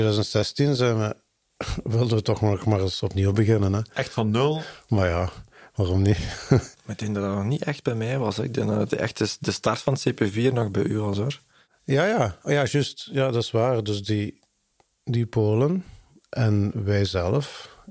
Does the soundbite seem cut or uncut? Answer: uncut